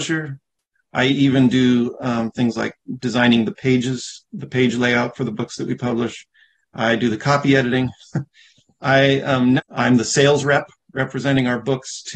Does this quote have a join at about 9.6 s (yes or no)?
yes